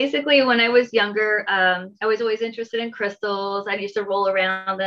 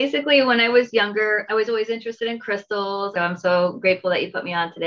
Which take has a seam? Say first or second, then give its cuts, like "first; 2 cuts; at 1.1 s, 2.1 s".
second; 2 cuts; at 1.5 s, 3.1 s